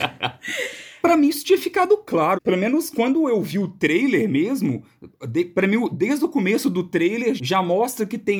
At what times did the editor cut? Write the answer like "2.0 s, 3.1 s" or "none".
1.0 s, 2.3 s, 7.4 s